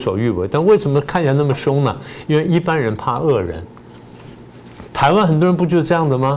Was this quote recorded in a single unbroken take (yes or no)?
no